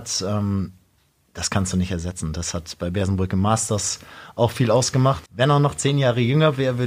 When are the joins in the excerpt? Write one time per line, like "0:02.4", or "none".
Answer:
0:05.3